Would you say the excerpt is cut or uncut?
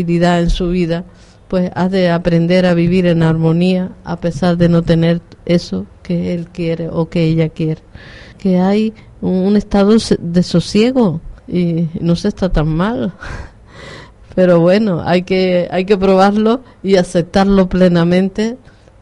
cut